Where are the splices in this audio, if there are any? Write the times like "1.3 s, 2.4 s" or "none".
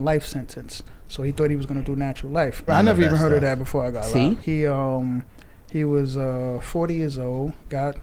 2.7 s, 4.4 s